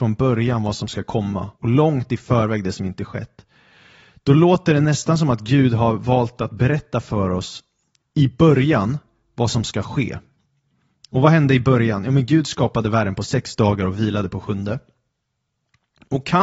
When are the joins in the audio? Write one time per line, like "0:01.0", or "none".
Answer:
0:01.5